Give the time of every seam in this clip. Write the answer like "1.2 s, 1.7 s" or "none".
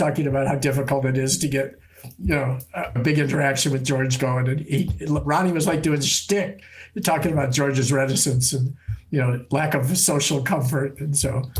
3.0 s